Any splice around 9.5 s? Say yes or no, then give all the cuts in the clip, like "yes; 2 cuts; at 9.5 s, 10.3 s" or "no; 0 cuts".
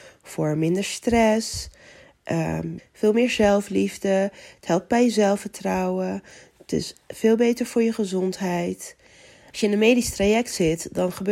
yes; 2 cuts; at 2.8 s, 9.5 s